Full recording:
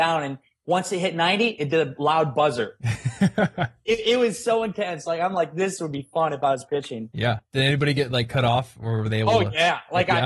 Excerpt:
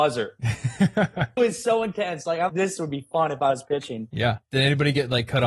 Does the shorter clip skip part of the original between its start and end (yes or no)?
yes